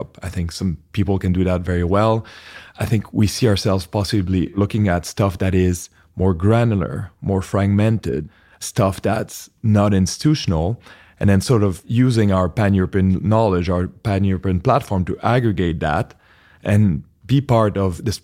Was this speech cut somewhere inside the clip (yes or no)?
no